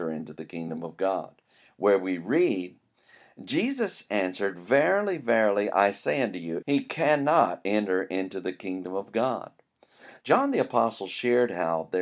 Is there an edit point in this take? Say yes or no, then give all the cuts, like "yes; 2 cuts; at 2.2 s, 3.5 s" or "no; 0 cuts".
yes; 2 cuts; at 6.6 s, 10.2 s